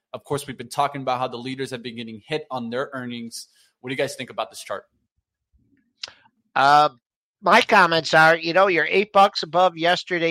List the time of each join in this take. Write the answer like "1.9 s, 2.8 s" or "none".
none